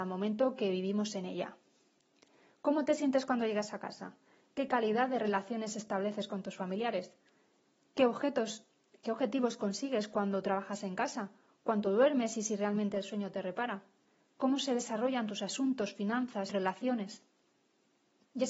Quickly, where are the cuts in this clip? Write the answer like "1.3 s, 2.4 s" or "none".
16.5 s